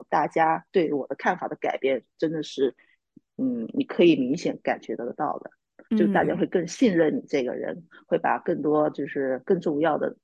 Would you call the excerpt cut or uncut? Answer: uncut